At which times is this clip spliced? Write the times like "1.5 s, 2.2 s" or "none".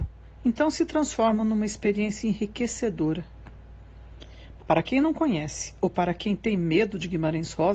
4.6 s